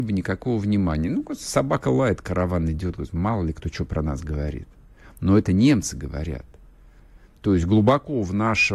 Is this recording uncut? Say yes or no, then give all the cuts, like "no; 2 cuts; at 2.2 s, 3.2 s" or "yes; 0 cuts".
yes; 0 cuts